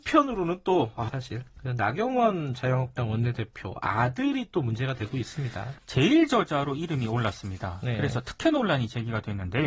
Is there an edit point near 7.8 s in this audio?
no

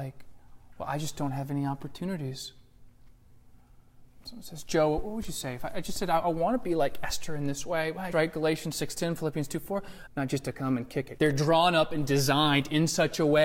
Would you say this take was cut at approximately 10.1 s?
yes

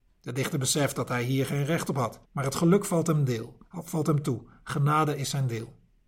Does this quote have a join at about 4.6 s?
no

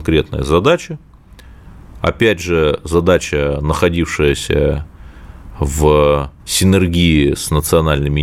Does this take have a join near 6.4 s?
yes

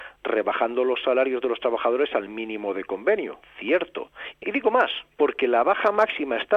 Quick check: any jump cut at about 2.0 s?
no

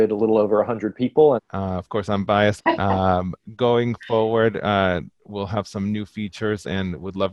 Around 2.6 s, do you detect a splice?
yes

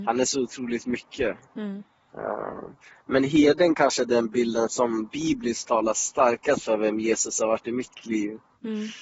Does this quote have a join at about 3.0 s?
no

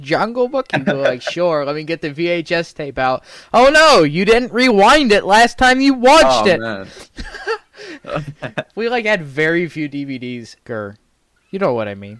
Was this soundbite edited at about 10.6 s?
yes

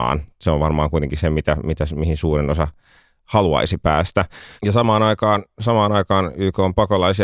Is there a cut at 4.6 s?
yes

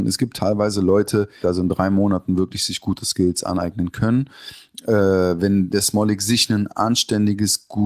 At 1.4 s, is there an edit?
yes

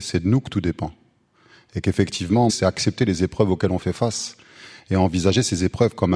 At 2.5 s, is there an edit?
yes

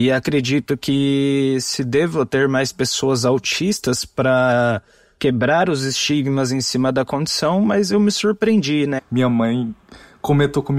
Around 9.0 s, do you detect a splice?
yes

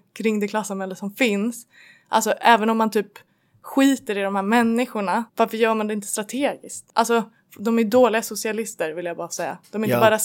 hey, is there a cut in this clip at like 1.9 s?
no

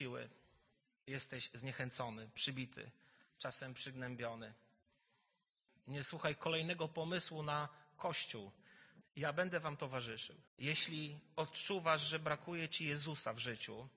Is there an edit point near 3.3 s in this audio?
no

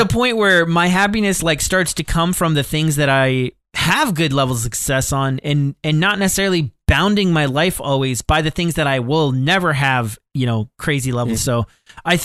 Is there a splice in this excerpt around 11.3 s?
yes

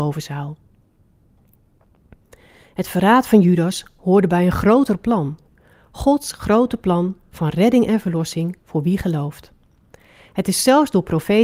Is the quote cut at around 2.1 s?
no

